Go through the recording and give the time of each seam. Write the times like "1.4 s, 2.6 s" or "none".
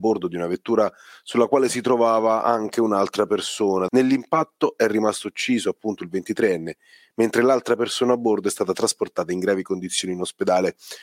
3.9 s